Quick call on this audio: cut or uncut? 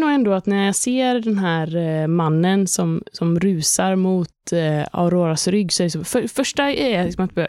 uncut